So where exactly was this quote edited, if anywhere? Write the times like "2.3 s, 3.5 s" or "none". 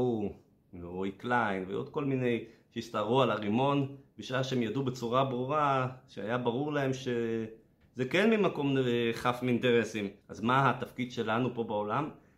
7.8 s, 10.2 s